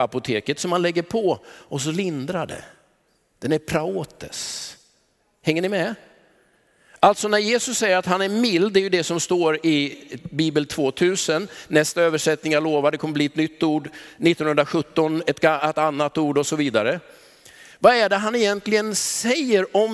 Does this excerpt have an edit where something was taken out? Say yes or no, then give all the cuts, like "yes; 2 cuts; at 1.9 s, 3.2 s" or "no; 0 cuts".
no; 0 cuts